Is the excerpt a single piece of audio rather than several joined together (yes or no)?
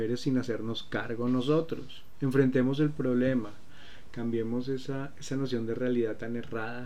yes